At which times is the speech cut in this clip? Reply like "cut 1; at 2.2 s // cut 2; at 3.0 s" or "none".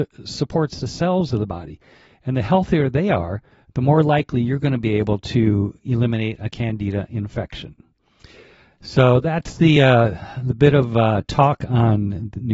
none